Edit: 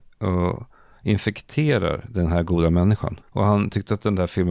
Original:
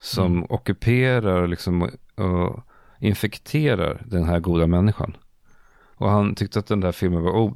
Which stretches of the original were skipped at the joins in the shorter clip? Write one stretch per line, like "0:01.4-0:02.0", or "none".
0:05.2-0:05.9

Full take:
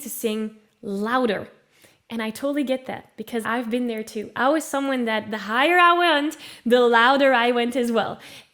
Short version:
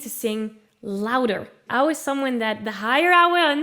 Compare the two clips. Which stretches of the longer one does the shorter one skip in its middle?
0:01.7-0:04.3

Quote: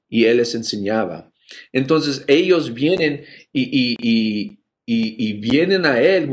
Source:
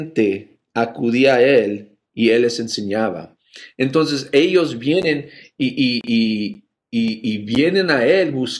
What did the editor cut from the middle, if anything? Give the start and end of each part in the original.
none

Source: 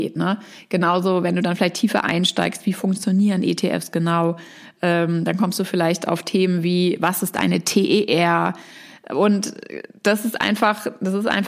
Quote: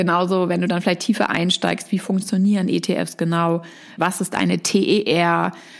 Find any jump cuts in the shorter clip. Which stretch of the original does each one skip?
0:04.7-0:07.0

